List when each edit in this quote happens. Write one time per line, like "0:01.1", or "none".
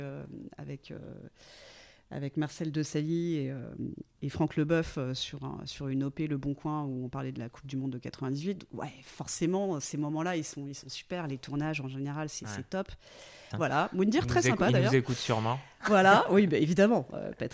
0:13.5